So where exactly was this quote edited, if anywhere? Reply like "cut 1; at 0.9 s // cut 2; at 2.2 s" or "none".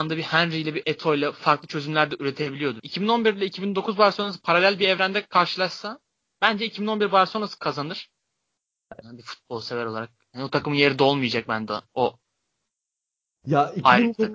cut 1; at 2.8 s // cut 2; at 9.0 s